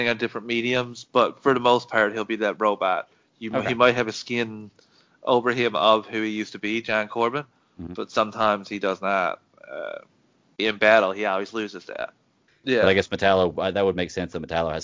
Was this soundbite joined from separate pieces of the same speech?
yes; 2 cuts; at 10.6 s, 12.5 s

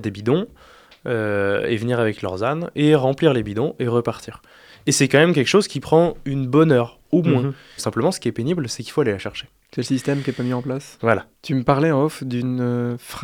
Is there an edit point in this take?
yes; 2 cuts; at 7.8 s, 11.3 s

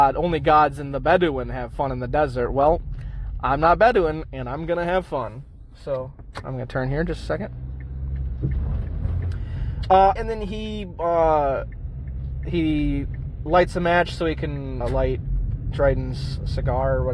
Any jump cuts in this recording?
yes; 2 cuts; at 10.2 s, 14.8 s

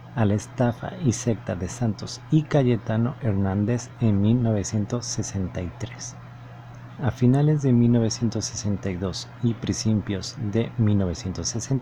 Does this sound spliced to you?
yes; 1 cut; at 7.0 s

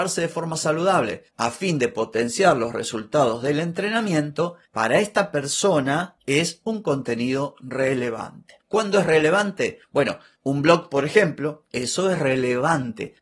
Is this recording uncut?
no; 2 cuts; at 8.6 s, 11.7 s

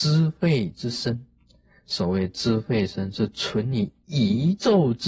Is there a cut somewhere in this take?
yes; 1 cut; at 2.9 s

